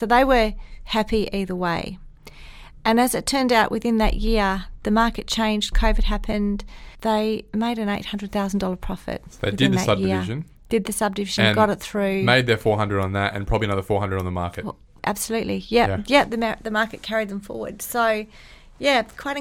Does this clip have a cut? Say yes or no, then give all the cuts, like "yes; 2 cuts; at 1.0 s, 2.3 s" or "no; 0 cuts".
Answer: no; 0 cuts